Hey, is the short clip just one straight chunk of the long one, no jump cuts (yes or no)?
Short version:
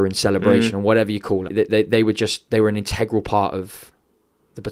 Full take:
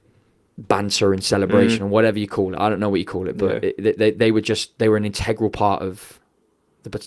no